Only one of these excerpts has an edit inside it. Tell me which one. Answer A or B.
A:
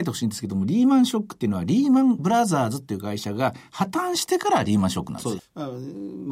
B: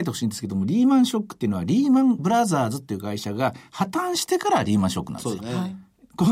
A